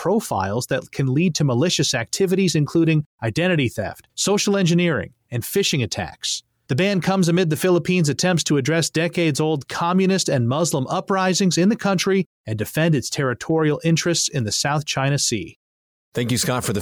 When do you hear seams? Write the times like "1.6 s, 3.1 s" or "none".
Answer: none

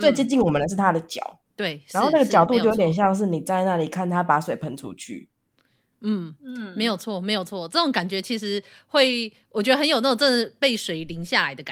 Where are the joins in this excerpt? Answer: 1.4 s

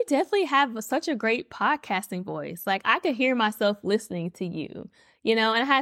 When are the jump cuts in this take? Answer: none

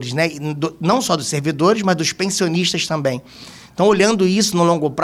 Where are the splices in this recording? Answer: none

